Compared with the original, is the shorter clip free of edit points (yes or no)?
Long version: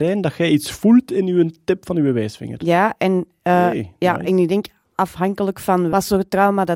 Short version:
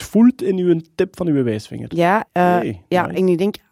no